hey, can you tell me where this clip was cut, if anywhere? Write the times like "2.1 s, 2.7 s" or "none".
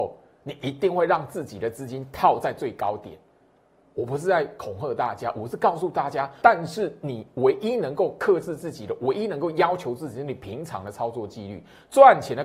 6.4 s

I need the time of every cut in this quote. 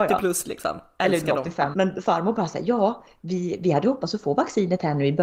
1.7 s

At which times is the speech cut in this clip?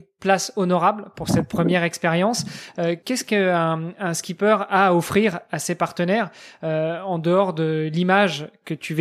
none

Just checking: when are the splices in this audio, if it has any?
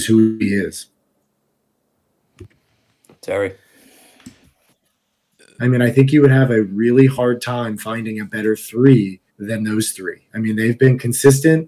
5.6 s, 9.3 s

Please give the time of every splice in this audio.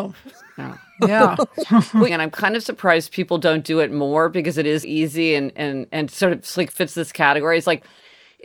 2.1 s, 4.8 s

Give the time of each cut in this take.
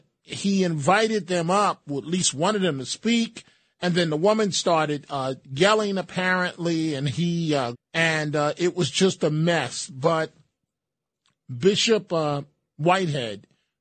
7.7 s

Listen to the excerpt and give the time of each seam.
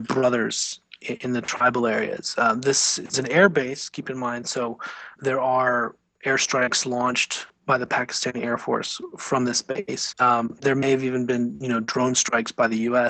10.1 s

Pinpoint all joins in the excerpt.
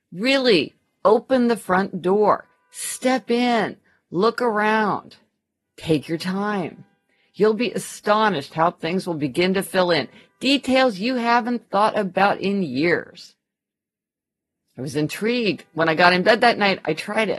none

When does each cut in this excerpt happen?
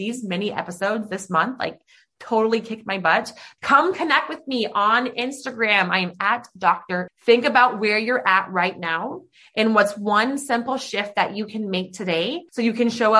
3.6 s, 7.1 s

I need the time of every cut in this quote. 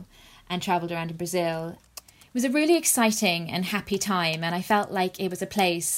1.8 s

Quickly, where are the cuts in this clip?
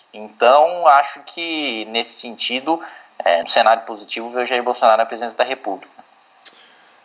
3.4 s

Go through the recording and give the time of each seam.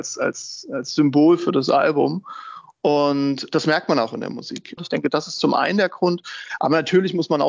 4.8 s

